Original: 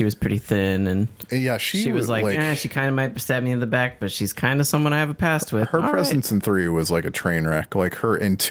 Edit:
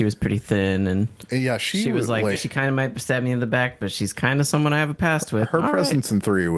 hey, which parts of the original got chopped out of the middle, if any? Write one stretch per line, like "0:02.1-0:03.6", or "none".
0:02.4-0:02.6